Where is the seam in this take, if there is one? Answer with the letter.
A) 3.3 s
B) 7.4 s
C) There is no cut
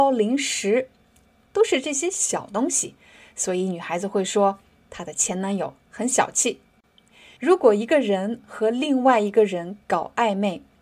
B